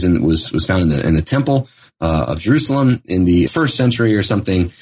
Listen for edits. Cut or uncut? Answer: cut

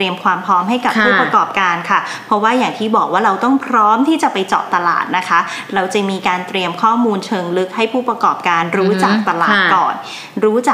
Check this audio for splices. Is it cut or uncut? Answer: uncut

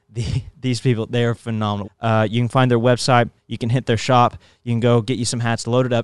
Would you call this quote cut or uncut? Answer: cut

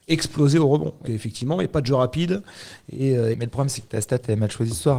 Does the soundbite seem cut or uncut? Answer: cut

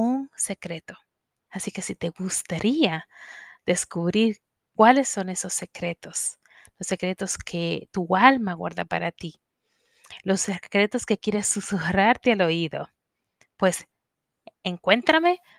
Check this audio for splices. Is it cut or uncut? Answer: cut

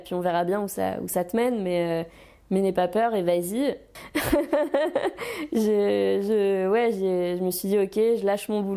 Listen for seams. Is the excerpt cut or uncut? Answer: cut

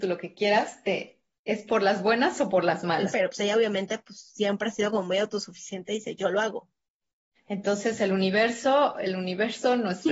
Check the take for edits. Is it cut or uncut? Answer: cut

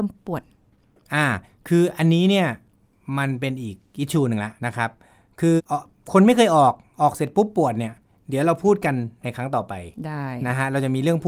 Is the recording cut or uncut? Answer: cut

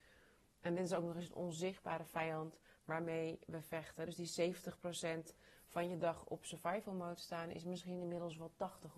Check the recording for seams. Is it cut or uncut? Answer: uncut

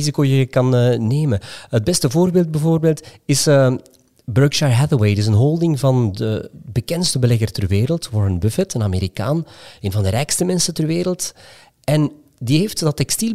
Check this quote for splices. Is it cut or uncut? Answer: uncut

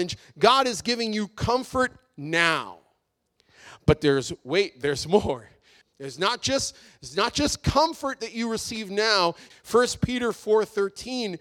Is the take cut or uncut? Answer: cut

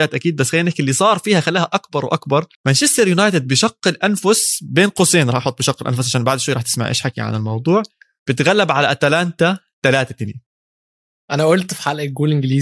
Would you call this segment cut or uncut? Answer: cut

